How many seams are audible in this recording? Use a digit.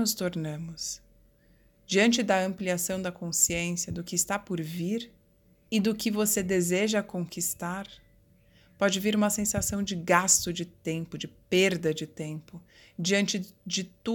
0